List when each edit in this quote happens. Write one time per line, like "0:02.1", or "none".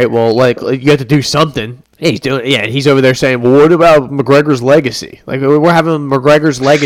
0:01.8

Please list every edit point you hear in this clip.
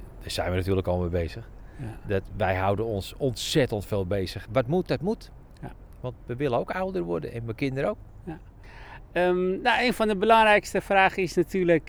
0:04.5

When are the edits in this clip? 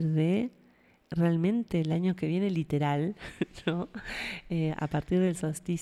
none

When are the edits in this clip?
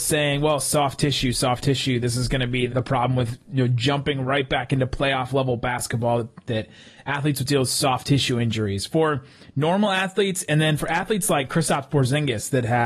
0:02.7

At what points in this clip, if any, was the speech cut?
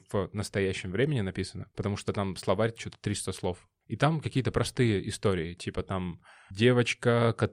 none

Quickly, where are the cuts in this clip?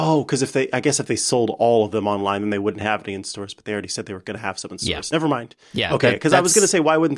none

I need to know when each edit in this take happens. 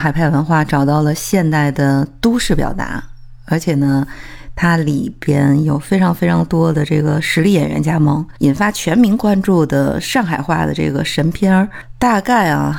0:08.4

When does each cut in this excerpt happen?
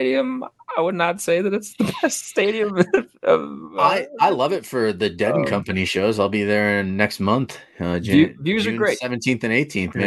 none

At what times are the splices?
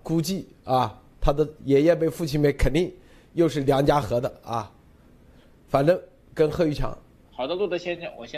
0:07.3

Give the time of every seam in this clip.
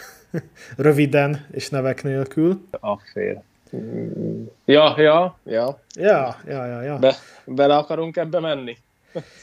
none

